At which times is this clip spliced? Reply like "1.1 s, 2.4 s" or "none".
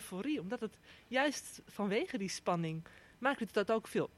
none